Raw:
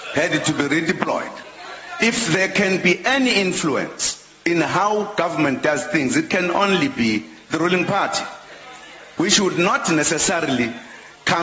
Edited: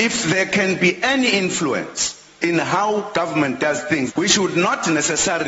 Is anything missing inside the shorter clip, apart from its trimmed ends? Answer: yes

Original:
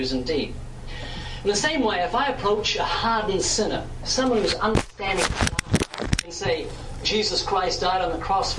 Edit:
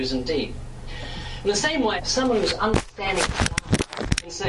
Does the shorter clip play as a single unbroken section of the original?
no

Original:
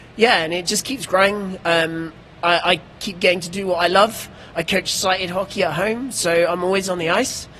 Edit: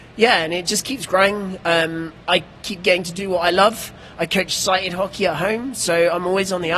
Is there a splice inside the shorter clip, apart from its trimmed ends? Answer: yes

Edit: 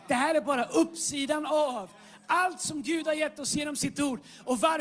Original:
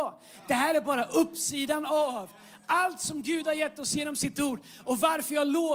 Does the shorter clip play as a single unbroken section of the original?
yes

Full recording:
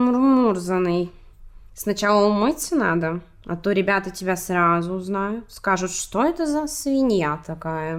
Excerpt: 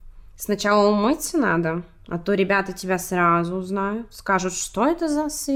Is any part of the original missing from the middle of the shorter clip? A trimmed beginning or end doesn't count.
no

